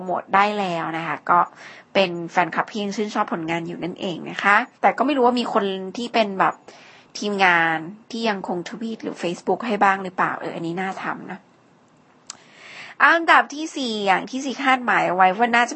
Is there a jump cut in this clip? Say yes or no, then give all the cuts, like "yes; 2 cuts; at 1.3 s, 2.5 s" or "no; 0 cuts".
yes; 1 cut; at 4.7 s